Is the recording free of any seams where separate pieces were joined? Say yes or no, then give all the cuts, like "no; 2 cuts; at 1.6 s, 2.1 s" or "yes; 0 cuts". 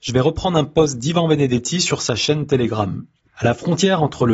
no; 1 cut; at 3.3 s